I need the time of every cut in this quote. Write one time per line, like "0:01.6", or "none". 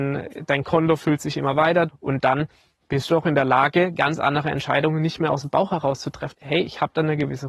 0:01.9
0:06.3